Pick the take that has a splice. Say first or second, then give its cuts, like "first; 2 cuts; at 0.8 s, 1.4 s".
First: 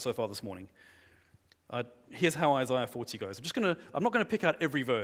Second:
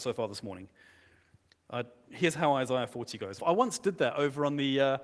second; 1 cut; at 3.4 s